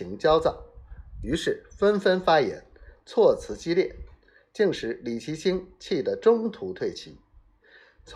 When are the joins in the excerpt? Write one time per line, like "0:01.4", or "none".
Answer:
none